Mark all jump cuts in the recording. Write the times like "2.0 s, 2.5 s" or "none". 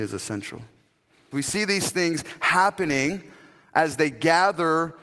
1.3 s